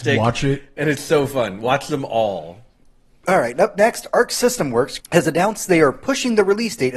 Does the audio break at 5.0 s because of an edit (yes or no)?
yes